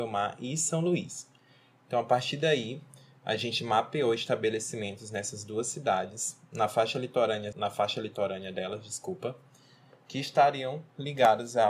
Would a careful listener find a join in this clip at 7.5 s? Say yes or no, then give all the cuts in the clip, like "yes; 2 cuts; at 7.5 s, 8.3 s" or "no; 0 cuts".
yes; 1 cut; at 7.5 s